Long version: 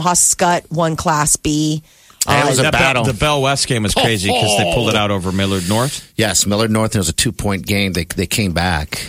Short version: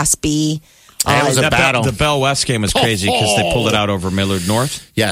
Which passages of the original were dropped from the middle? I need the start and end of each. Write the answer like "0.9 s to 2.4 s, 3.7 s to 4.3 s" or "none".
none